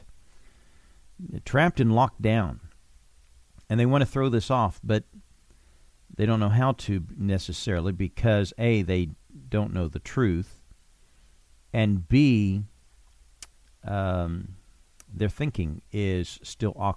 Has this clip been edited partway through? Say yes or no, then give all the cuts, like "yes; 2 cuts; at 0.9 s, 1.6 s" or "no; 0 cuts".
no; 0 cuts